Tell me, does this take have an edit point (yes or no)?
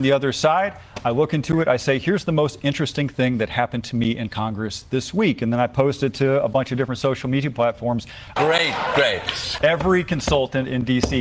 yes